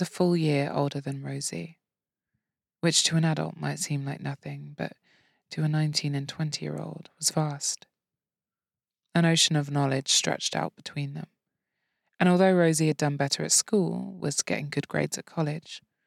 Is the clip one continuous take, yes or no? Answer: yes